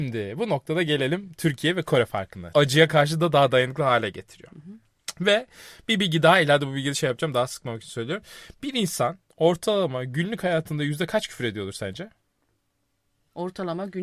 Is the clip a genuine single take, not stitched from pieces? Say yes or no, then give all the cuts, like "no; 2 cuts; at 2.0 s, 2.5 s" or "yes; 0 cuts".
no; 1 cut; at 2.5 s